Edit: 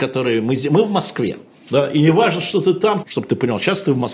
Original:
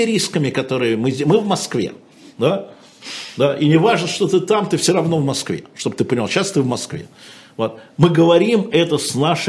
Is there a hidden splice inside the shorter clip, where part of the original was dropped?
yes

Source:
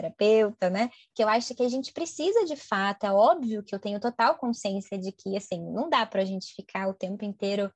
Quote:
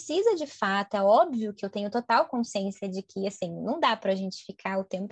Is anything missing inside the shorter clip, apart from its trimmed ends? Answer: no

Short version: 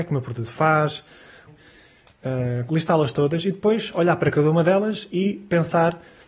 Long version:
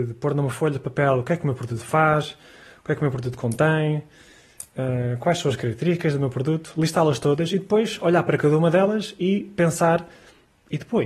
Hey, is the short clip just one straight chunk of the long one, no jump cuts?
no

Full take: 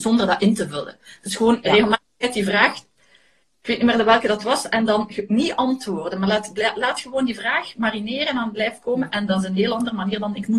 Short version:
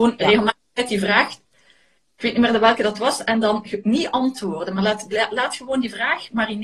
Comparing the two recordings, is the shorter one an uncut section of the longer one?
yes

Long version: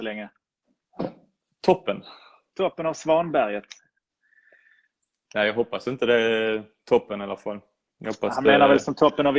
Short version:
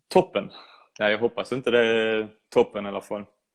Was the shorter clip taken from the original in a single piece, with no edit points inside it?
no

